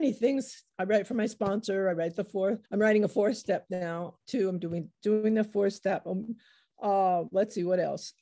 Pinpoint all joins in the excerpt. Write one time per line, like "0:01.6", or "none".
0:02.7
0:04.2